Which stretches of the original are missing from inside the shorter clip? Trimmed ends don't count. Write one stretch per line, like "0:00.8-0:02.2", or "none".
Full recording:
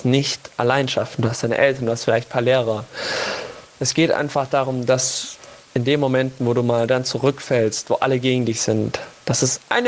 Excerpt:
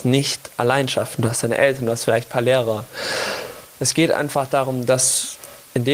none